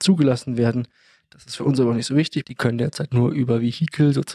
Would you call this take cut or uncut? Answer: cut